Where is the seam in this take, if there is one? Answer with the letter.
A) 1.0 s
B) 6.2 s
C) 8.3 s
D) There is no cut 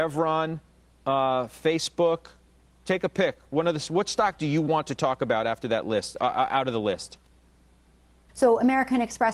C